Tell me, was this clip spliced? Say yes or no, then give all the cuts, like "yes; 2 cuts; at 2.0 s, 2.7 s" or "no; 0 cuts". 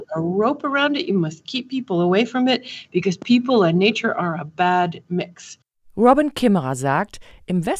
no; 0 cuts